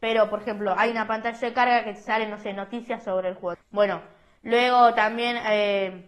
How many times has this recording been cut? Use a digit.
1